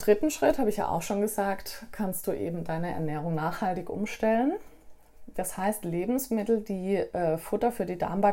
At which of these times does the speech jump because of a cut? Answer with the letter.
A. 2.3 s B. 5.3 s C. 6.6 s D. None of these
B